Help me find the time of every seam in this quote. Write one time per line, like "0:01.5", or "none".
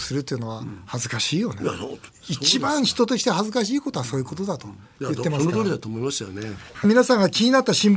0:02.1
0:06.8